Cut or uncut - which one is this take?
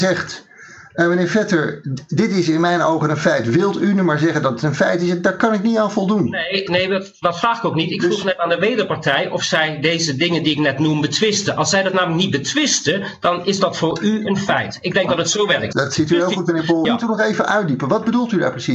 cut